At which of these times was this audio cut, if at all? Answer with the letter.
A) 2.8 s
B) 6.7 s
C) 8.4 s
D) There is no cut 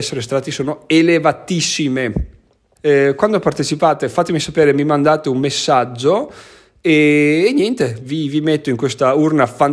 A